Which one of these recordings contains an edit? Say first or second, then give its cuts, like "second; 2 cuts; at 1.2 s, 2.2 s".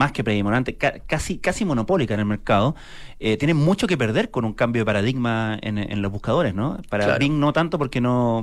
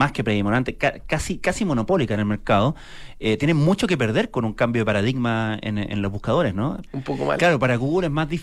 second; 1 cut; at 6.9 s